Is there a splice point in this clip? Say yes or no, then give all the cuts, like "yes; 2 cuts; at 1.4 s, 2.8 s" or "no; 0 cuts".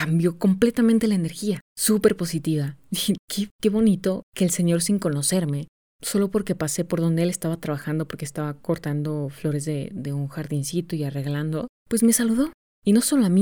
no; 0 cuts